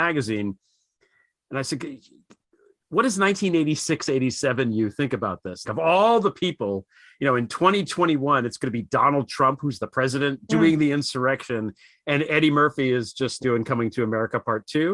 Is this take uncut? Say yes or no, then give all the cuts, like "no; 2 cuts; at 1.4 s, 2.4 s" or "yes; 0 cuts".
no; 2 cuts; at 5.6 s, 13.4 s